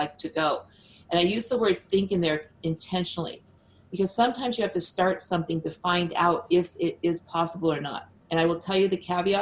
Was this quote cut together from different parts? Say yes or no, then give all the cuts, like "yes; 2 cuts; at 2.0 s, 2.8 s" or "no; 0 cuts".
no; 0 cuts